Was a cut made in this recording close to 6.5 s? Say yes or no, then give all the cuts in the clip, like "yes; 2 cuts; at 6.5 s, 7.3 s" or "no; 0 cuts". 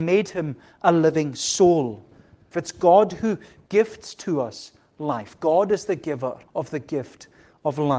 yes; 2 cuts; at 2.5 s, 6.5 s